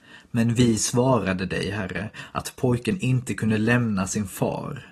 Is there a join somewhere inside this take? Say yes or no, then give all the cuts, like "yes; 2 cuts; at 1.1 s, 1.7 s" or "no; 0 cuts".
no; 0 cuts